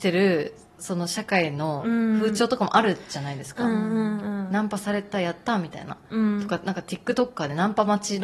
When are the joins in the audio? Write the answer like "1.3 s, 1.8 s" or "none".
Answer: none